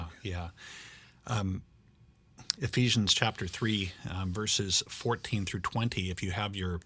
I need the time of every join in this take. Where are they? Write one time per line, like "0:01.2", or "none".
none